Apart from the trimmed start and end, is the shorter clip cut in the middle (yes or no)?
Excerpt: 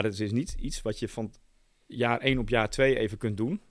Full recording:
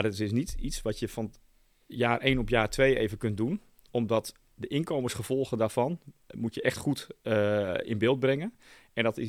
no